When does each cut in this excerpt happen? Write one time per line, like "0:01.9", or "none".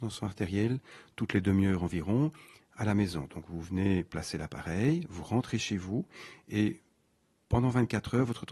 none